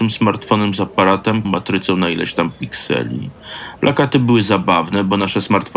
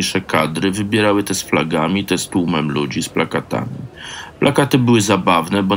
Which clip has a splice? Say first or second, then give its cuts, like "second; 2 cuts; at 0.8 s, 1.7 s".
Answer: first; 2 cuts; at 1.4 s, 3.8 s